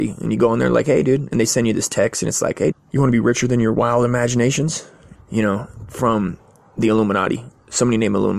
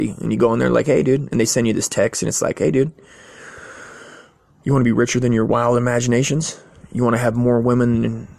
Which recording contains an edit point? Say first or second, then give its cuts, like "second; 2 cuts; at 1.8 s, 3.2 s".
first; 2 cuts; at 2.7 s, 5.1 s